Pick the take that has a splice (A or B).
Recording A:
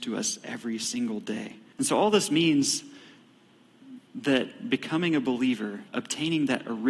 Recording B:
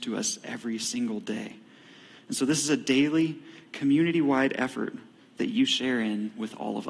A